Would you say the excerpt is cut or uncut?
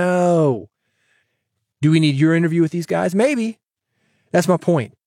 uncut